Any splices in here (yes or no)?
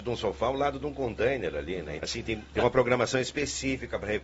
yes